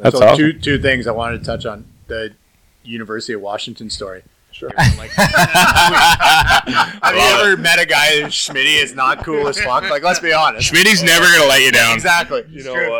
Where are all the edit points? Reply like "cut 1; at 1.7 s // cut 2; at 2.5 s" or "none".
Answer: cut 1; at 4.7 s

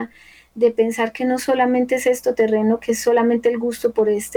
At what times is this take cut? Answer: none

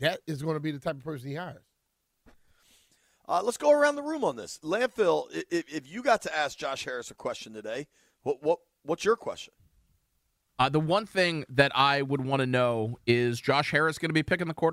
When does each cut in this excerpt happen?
none

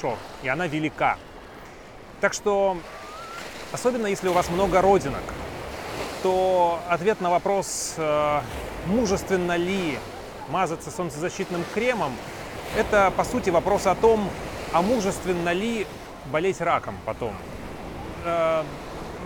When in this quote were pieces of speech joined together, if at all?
none

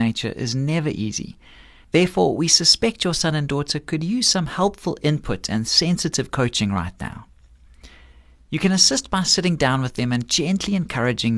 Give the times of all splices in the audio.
none

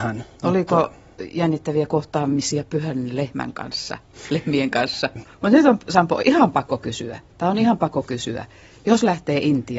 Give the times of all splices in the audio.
cut 1; at 5.2 s

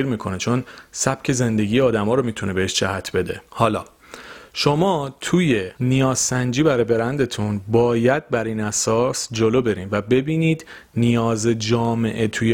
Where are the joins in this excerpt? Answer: cut 1; at 3.5 s // cut 2; at 5.7 s

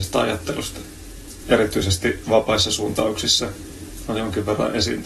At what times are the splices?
cut 1; at 1.4 s

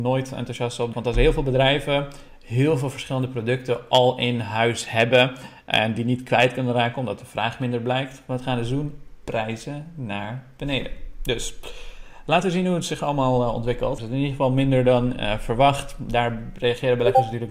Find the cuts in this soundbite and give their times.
cut 1; at 0.9 s // cut 2; at 14.0 s

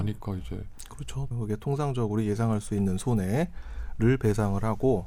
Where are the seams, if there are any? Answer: cut 1; at 1.3 s

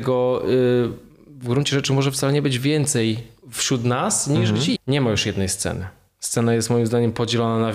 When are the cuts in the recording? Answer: cut 1; at 3.4 s // cut 2; at 4.8 s

